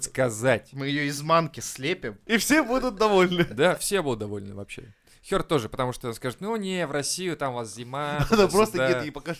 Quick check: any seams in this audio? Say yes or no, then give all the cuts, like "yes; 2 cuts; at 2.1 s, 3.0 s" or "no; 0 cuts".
yes; 1 cut; at 2.3 s